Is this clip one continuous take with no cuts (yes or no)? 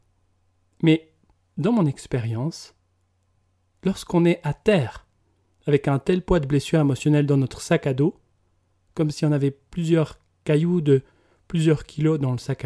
yes